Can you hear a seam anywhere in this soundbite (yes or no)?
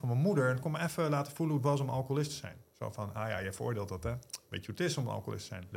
no